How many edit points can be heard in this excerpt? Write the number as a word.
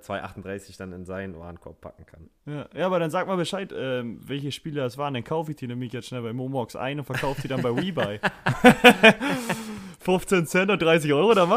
zero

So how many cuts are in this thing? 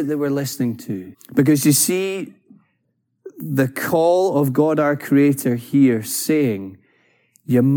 one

